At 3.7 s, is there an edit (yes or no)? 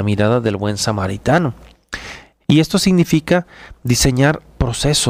no